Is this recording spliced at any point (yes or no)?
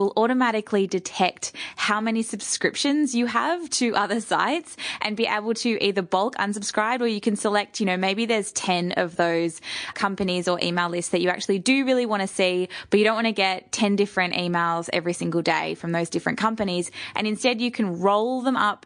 yes